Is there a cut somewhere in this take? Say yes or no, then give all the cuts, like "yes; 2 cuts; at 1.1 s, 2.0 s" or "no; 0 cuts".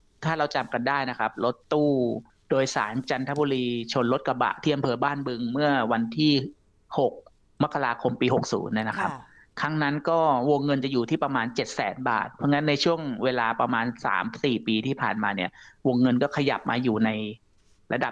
no; 0 cuts